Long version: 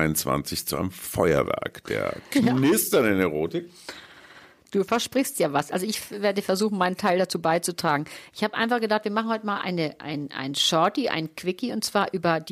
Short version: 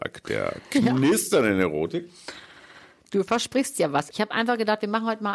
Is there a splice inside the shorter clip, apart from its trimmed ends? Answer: yes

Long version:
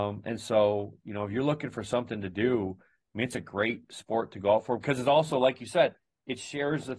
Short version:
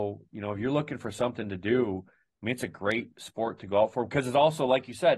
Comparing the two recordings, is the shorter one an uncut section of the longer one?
yes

